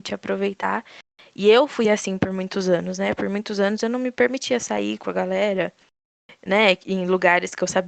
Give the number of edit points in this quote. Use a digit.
0